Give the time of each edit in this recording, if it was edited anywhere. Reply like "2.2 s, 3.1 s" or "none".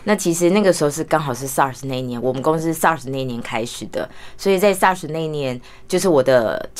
none